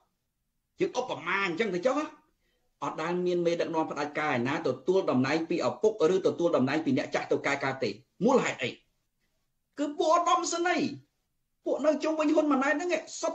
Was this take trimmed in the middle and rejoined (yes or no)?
no